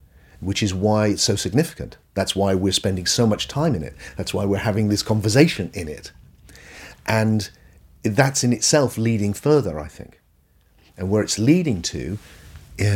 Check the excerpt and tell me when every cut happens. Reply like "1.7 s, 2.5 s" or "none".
none